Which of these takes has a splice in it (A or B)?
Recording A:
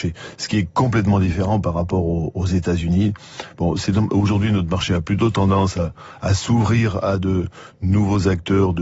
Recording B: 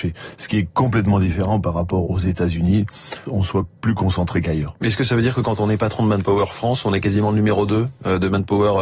B